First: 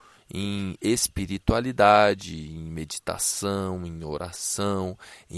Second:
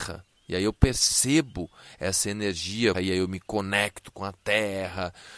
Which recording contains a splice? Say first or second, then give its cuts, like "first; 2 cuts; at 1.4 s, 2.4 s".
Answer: second; 1 cut; at 2.9 s